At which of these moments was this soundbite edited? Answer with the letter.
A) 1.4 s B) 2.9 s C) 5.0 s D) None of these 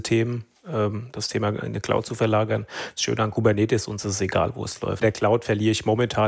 C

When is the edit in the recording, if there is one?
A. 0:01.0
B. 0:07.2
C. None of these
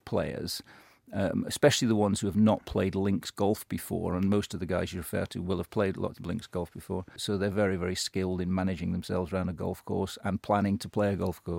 B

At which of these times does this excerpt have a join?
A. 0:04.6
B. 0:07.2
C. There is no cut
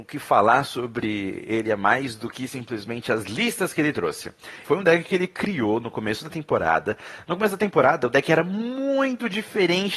A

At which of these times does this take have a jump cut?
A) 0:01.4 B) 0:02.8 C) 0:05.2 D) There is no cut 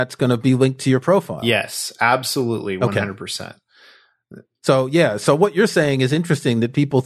D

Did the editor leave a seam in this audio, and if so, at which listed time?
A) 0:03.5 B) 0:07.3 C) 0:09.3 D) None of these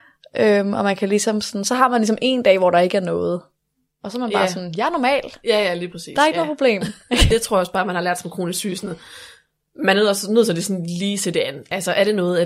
B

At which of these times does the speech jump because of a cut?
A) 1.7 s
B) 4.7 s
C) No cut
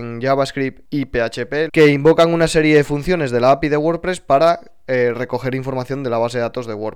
A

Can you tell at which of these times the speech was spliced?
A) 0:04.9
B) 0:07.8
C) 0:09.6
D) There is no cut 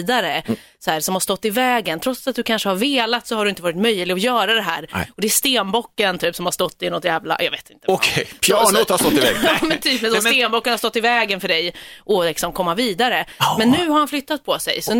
D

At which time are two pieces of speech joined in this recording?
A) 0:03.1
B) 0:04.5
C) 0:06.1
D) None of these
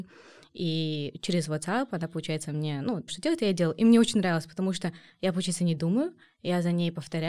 A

